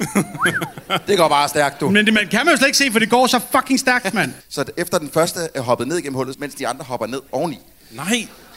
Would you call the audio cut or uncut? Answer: cut